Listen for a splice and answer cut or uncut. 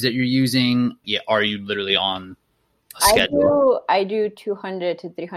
cut